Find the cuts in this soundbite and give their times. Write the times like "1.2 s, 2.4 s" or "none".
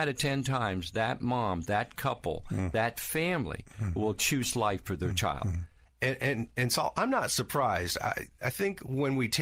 5.9 s